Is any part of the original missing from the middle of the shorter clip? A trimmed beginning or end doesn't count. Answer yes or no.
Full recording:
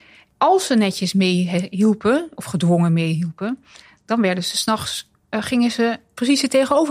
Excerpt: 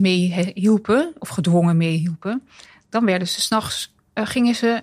no